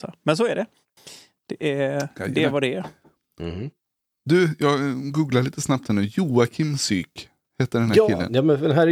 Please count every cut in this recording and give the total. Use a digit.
0